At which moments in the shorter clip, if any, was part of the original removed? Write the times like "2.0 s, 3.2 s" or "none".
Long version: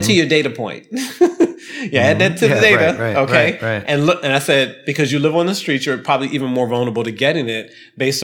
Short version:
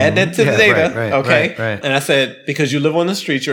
1.8 s